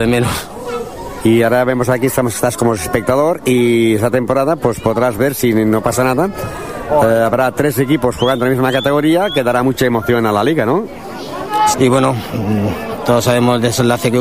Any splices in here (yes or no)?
yes